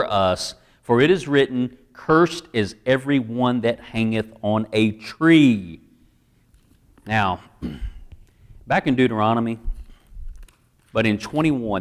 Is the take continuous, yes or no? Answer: no